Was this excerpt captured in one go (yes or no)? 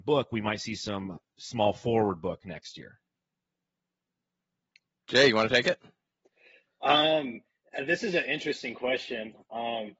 yes